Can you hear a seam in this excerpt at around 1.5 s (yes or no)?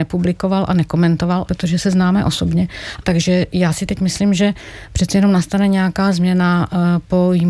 yes